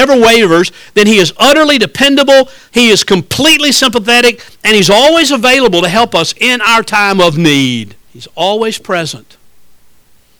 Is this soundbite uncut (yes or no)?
no